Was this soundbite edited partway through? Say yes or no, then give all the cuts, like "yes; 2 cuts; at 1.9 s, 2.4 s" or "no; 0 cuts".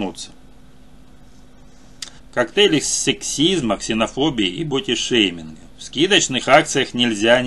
yes; 2 cuts; at 2.2 s, 5.7 s